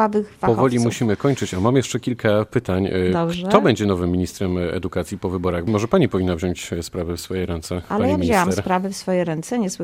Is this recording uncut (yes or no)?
yes